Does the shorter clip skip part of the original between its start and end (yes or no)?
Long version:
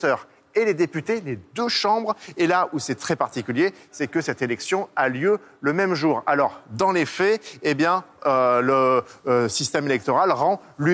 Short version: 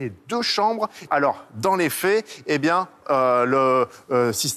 yes